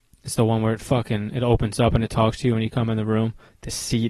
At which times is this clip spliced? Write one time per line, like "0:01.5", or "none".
none